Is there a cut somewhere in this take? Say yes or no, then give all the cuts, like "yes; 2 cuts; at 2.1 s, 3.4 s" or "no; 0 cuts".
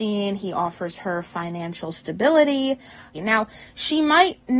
yes; 1 cut; at 3.1 s